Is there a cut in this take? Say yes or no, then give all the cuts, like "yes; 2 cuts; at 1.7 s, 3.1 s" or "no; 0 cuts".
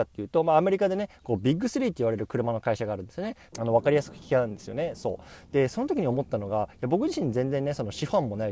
yes; 1 cut; at 3.5 s